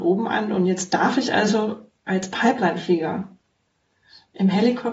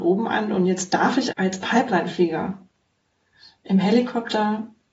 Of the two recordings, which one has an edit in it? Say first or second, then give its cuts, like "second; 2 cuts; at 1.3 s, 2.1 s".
second; 1 cut; at 1.3 s